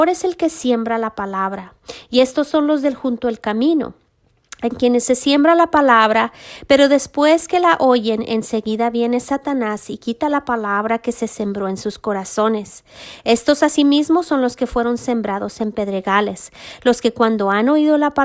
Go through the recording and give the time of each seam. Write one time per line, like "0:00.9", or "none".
none